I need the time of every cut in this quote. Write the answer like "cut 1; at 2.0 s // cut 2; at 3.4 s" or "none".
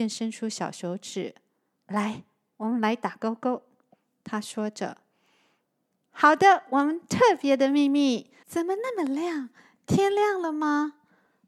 cut 1; at 8.4 s

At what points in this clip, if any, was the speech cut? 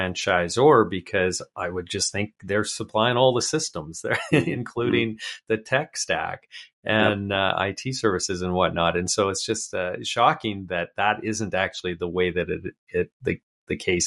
none

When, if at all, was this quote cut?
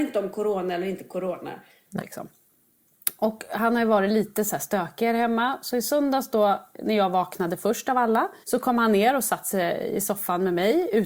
cut 1; at 2.0 s // cut 2; at 8.4 s

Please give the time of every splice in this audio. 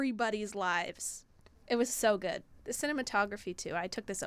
none

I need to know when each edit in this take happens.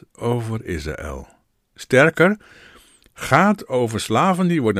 none

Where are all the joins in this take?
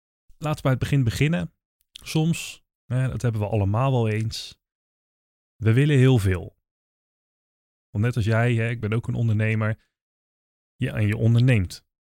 none

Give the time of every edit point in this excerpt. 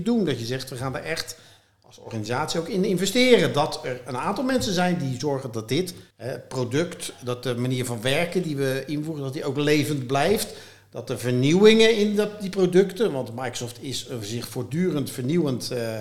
cut 1; at 6.1 s

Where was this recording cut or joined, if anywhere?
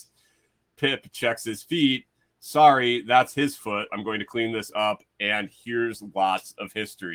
cut 1; at 3.9 s

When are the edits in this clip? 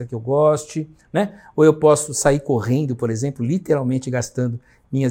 none

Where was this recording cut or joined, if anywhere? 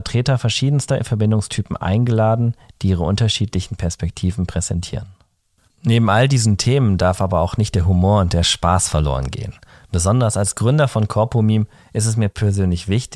cut 1; at 5.7 s

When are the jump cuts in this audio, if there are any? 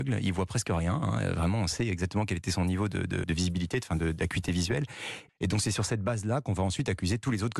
cut 1; at 3.2 s // cut 2; at 5.3 s

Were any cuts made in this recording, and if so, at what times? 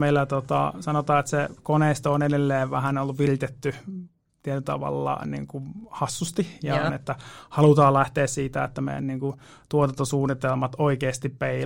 cut 1; at 6.9 s

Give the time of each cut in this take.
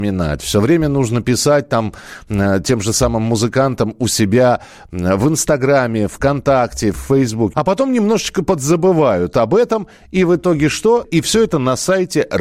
cut 1; at 7.5 s // cut 2; at 11.0 s

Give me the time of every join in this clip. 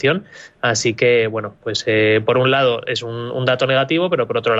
none

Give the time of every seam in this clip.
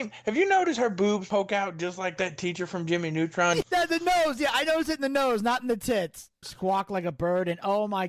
cut 1; at 3.6 s // cut 2; at 6.4 s

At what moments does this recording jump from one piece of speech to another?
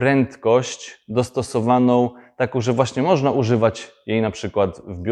none

